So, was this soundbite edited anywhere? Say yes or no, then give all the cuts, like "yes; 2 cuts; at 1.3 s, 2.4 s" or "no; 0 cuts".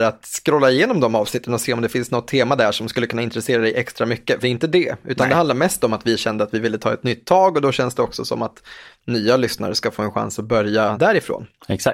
yes; 2 cuts; at 4.4 s, 10.9 s